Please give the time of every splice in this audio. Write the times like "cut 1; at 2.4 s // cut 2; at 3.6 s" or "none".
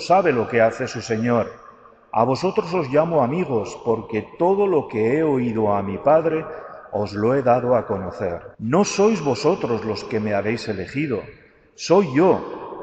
cut 1; at 8.5 s